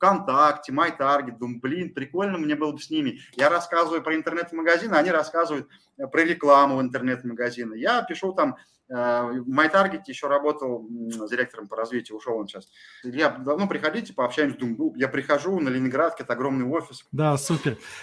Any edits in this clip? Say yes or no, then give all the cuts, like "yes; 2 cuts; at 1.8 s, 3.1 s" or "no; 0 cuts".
yes; 3 cuts; at 11.3 s, 13.0 s, 17.0 s